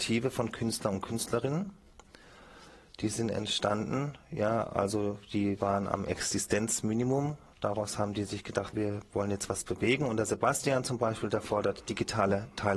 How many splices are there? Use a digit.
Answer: 1